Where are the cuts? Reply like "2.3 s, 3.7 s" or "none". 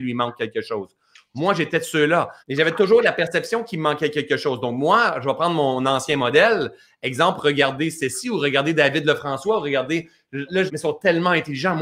2.4 s, 10.7 s